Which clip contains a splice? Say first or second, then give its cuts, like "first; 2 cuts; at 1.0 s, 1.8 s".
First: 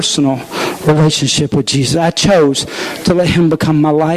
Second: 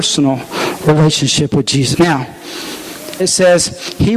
second; 2 cuts; at 1.9 s, 3.2 s